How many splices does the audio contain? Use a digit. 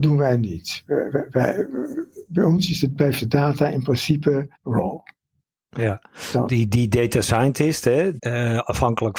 3